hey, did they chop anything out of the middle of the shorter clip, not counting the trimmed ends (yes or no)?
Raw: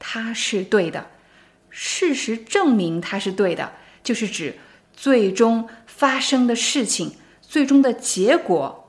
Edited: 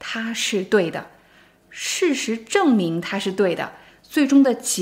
yes